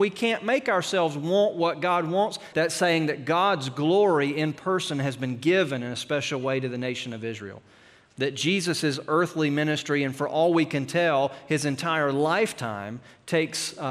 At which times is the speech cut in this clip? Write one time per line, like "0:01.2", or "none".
0:02.5